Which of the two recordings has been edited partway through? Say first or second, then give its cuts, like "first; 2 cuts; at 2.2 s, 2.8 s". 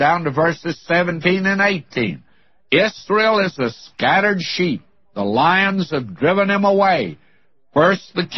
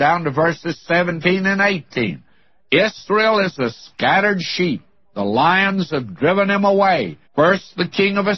second; 1 cut; at 7.3 s